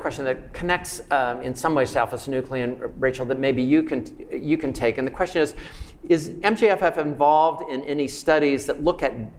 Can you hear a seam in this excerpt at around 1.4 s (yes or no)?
no